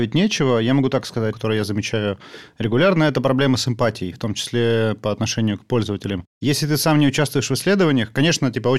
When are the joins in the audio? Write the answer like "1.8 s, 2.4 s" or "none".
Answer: 1.3 s